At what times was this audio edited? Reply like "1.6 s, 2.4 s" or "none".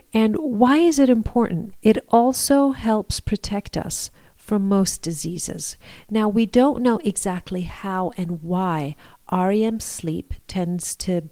1.7 s